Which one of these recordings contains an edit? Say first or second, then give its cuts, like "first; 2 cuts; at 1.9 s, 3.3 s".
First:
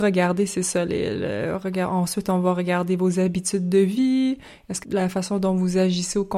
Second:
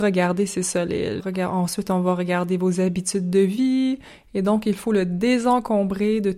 second; 2 cuts; at 1.2 s, 4.2 s